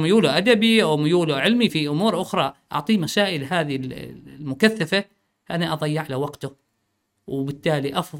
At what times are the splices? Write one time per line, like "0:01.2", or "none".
0:01.7